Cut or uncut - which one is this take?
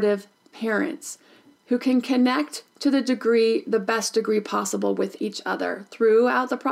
uncut